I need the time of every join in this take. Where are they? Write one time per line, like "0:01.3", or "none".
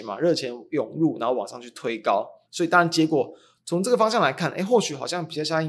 0:02.4

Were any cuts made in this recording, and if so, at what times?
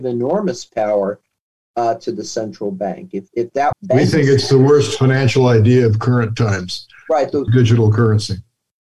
0:03.7
0:07.5

